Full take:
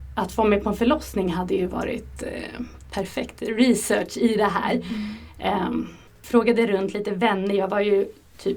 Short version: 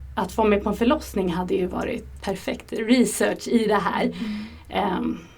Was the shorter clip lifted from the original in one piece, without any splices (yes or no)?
no